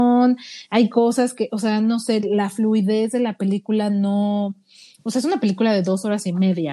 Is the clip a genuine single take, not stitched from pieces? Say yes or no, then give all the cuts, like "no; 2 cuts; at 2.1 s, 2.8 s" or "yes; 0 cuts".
yes; 0 cuts